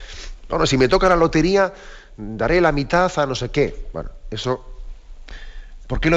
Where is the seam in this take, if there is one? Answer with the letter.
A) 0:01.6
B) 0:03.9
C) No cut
C